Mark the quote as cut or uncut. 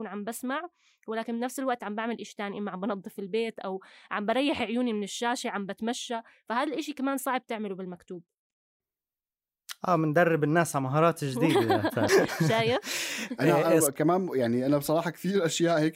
cut